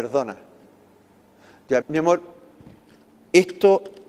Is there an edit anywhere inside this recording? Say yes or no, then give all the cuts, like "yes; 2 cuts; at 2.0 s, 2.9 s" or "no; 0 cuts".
yes; 1 cut; at 1.8 s